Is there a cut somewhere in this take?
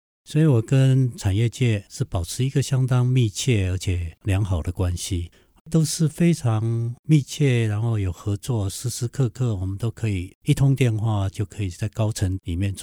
yes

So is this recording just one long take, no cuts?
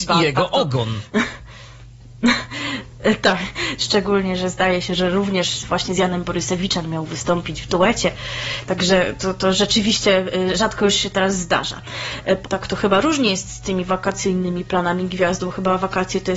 no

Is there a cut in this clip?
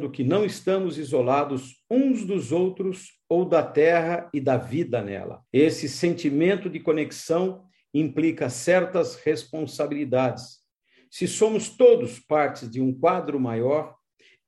yes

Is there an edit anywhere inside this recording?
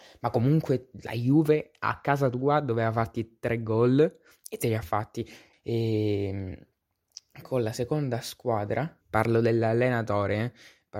yes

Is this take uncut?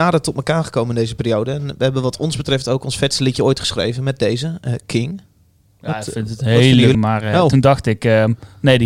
no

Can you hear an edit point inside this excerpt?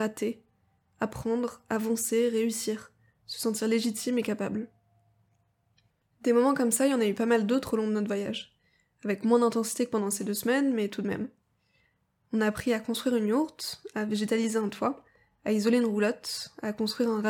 no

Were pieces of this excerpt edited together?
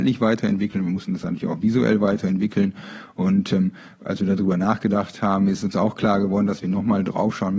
no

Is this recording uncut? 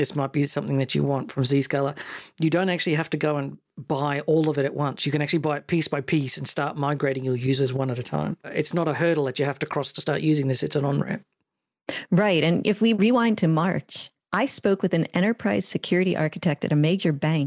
yes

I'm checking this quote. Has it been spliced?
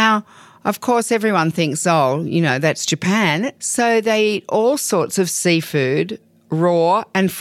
yes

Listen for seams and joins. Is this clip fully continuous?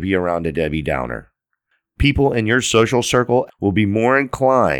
no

